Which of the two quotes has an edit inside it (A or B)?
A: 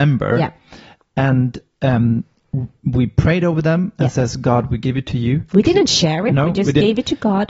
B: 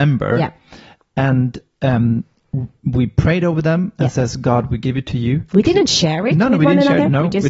A